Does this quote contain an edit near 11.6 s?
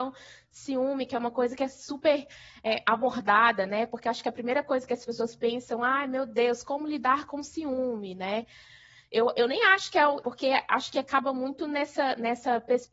no; 1 cut; at 10.2 s

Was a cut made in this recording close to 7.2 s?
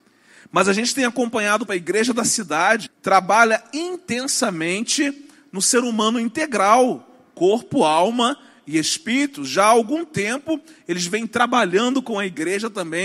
no; 2 cuts; at 1.7 s, 2.9 s

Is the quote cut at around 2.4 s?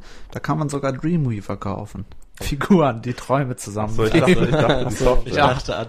yes; 1 cut; at 2.4 s

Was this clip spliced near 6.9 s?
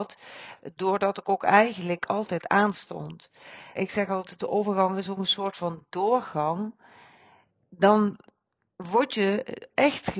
no; 1 cut; at 3.7 s

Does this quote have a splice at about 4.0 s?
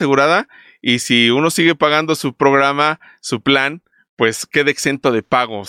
no; 0 cuts

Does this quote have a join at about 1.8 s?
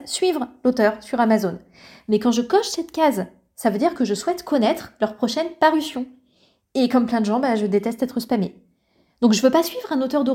no; 0 cuts

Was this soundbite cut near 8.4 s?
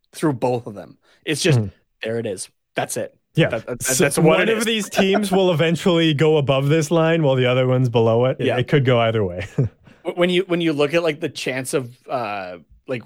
yes; 1 cut; at 8.4 s

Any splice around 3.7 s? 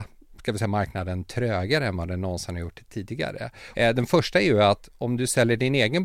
yes; 1 cut; at 3.7 s

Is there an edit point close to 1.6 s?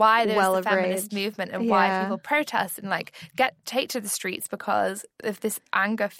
no; 0 cuts

